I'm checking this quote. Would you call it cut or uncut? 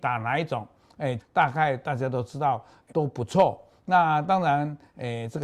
cut